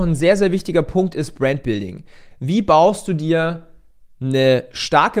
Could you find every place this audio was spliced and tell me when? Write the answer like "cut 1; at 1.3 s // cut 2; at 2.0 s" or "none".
none